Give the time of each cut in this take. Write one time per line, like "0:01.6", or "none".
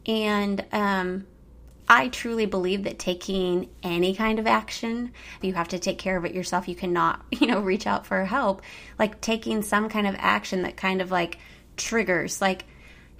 0:05.4